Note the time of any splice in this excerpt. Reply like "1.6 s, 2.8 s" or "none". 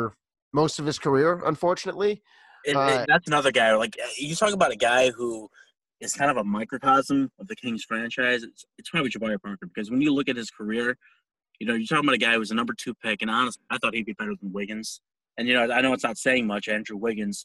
3.0 s